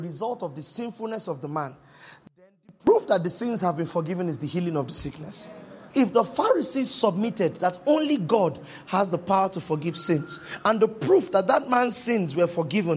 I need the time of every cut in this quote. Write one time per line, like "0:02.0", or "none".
0:05.9